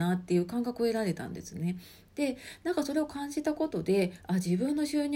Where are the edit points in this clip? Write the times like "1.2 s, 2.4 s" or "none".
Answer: none